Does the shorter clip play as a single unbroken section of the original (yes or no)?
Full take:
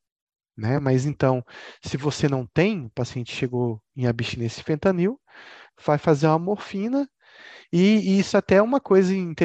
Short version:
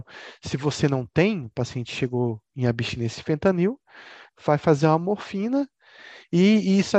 yes